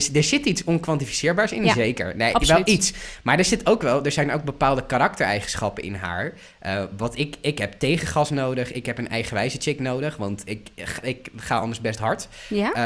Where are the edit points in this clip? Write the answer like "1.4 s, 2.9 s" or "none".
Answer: none